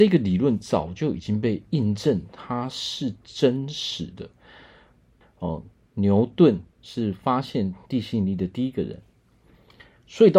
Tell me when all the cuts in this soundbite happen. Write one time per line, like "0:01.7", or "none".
0:05.2
0:06.7